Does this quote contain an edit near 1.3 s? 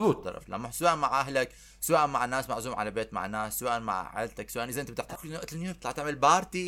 no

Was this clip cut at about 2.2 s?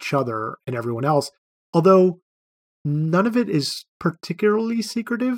no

